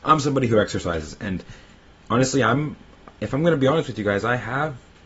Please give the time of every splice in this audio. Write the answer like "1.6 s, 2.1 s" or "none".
none